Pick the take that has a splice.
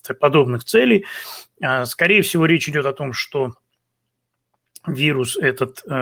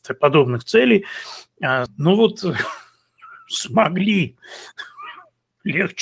second; 1 cut; at 1.9 s

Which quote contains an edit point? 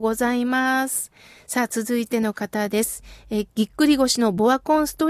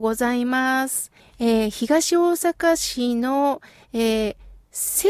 second; 1 cut; at 1.2 s

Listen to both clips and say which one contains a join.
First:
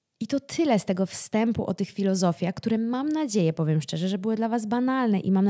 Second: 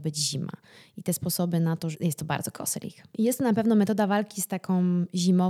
second; 1 cut; at 1.9 s

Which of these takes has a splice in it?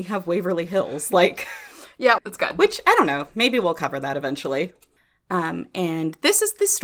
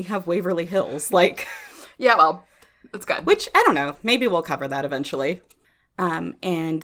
first; 1 cut; at 2.2 s

